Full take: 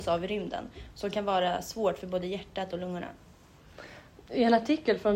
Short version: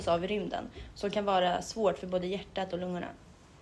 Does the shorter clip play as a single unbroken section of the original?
yes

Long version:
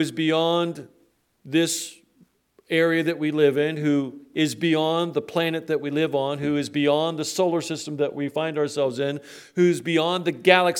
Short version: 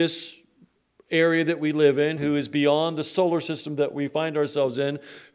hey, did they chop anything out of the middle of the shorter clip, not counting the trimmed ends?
yes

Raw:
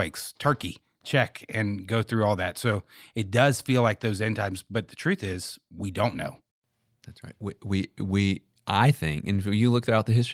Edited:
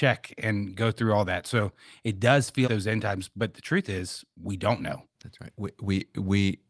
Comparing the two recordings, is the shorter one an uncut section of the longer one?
no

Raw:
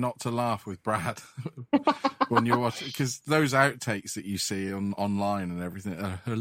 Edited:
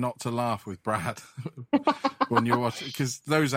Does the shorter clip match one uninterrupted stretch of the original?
yes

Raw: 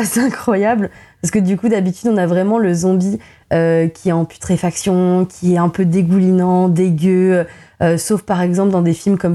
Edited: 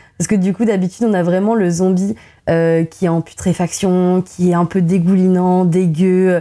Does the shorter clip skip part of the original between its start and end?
no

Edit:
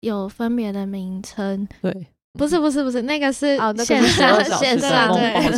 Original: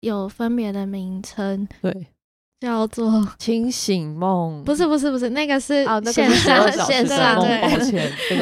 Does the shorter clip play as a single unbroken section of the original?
no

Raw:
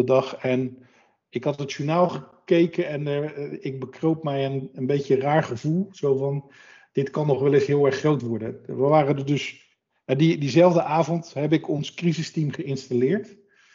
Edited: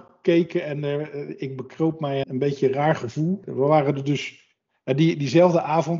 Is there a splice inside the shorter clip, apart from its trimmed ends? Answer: yes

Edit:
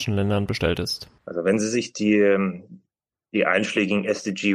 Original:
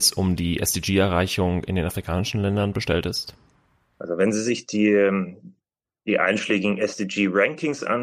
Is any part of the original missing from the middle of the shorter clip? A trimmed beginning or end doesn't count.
yes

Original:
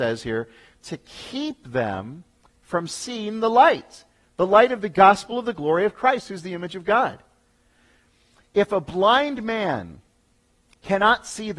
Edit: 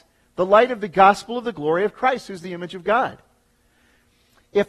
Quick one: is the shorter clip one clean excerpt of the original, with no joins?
yes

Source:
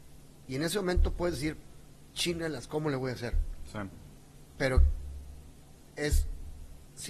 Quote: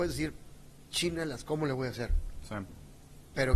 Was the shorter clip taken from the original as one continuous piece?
yes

